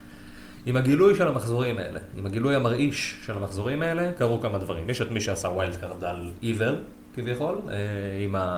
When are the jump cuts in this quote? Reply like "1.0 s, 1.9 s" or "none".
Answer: none

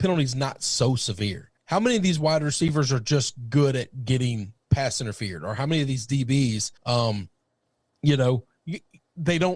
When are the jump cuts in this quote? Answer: 1.6 s, 6.8 s

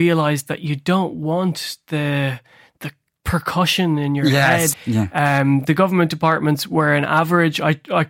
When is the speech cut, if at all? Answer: 3.1 s, 4.7 s

